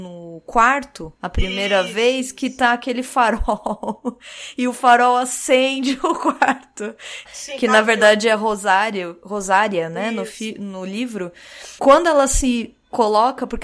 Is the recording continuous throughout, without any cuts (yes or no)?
no